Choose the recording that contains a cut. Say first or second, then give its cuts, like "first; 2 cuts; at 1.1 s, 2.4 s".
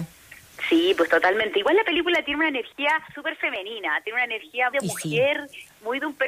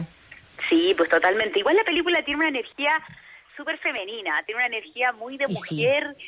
first; 2 cuts; at 3.1 s, 4.7 s